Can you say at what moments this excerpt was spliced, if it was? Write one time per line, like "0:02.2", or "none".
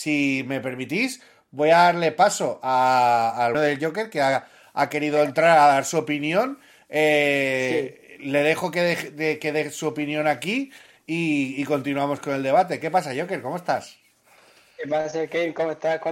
0:03.5